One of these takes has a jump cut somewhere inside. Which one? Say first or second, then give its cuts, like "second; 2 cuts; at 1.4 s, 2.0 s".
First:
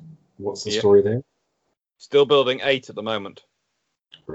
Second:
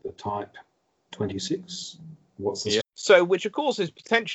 second; 1 cut; at 2.8 s